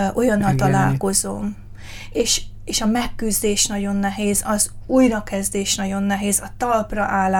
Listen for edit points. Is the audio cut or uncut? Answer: uncut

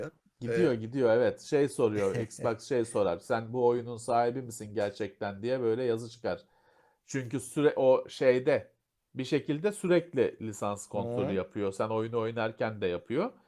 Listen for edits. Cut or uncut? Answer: uncut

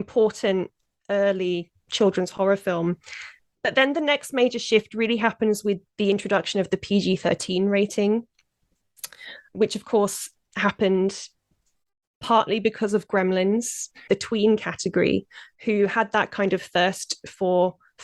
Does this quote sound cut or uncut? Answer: cut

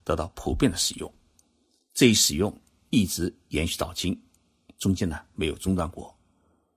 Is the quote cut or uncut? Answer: uncut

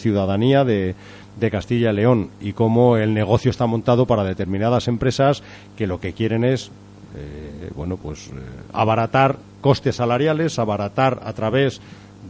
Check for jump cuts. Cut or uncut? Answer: uncut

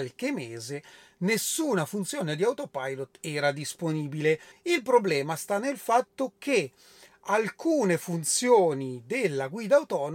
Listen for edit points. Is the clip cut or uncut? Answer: cut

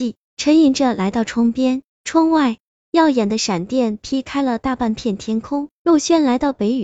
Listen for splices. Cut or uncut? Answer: cut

